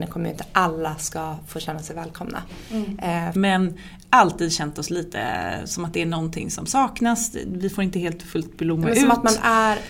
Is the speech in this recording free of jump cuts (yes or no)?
no